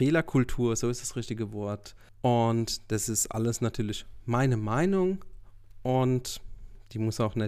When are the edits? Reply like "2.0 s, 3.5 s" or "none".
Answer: 2.1 s